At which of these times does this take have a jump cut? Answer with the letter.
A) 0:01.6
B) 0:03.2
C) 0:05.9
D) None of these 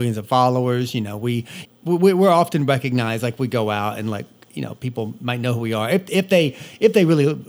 A